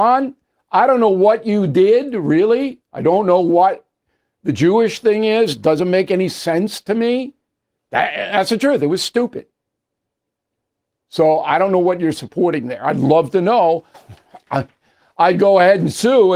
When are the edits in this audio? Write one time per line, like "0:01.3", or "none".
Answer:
0:07.8
0:13.9